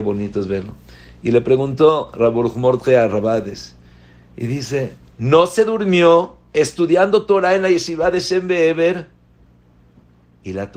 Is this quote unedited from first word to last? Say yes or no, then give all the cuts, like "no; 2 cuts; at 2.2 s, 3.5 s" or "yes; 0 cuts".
no; 1 cut; at 5.1 s